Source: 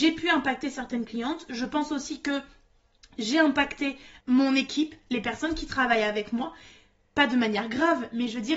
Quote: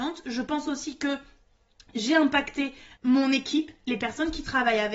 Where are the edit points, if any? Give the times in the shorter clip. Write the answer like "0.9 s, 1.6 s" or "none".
none